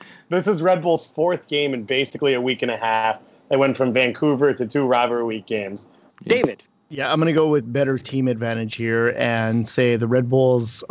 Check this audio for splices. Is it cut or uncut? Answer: cut